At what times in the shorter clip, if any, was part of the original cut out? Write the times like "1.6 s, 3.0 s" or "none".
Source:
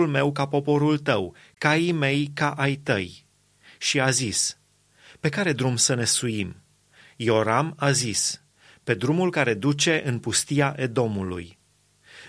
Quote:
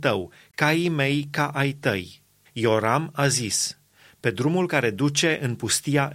2.5 s